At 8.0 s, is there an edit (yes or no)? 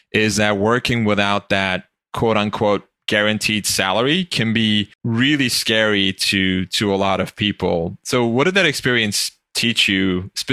no